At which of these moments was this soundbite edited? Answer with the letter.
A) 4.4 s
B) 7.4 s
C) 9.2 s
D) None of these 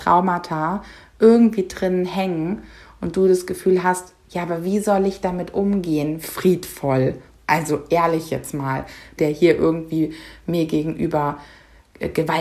C